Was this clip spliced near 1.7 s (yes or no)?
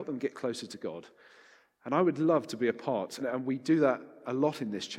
no